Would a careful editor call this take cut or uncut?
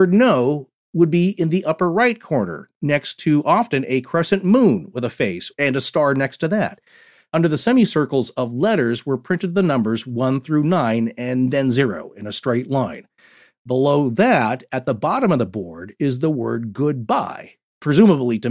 uncut